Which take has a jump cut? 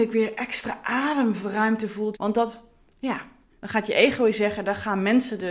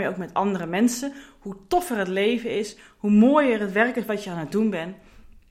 first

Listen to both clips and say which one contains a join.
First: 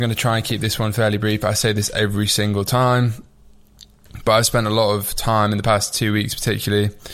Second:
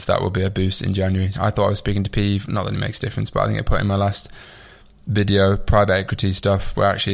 second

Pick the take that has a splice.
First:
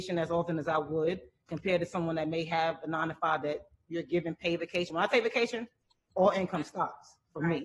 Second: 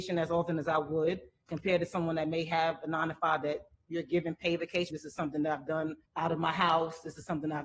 second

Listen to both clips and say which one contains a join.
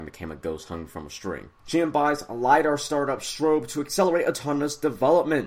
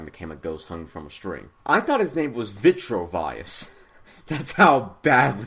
first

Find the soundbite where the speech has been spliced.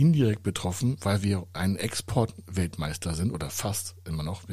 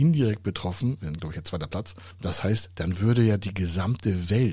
second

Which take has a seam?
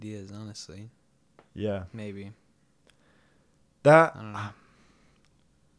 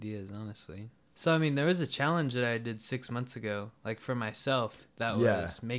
second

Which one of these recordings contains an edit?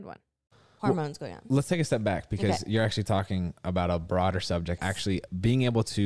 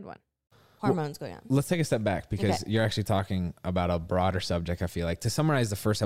first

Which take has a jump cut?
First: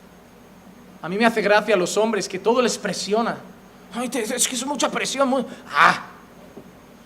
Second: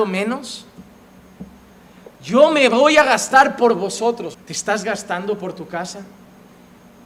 second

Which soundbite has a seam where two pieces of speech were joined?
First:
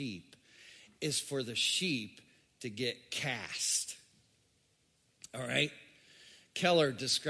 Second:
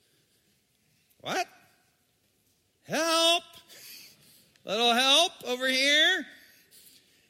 second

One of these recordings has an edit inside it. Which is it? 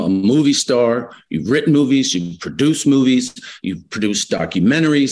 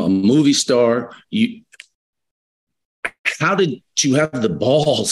second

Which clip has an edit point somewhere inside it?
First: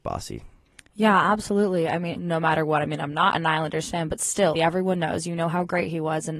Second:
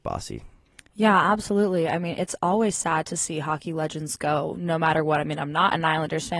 first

